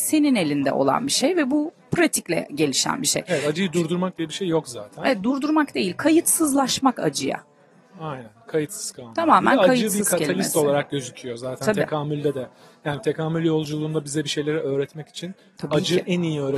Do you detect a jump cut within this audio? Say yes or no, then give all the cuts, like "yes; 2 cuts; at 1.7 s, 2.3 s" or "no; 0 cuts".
no; 0 cuts